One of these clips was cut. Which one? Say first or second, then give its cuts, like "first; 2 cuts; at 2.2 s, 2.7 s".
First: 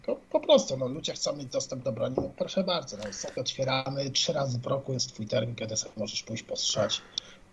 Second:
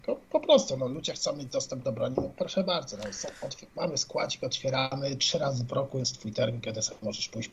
first; 1 cut; at 3.3 s